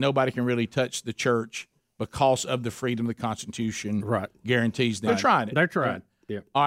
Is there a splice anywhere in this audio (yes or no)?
yes